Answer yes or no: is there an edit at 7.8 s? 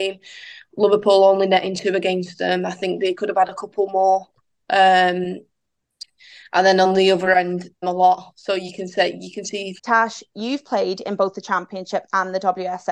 yes